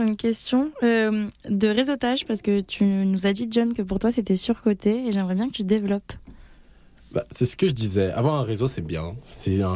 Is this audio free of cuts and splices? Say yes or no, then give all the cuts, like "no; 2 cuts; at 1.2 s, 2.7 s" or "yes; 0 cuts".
yes; 0 cuts